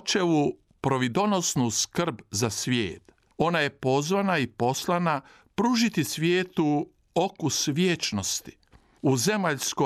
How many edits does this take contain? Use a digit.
1